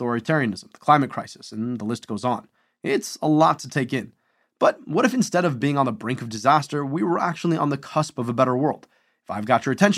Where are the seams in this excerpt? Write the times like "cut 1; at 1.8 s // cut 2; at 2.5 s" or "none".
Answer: none